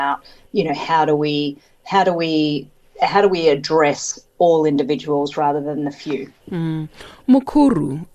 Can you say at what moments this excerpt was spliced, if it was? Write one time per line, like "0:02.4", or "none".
0:06.4